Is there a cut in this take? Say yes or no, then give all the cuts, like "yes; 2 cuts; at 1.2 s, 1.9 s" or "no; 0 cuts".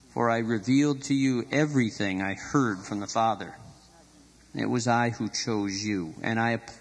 yes; 1 cut; at 4.4 s